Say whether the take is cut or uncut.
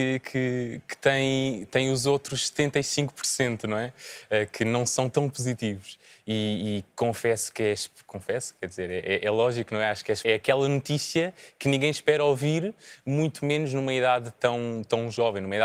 cut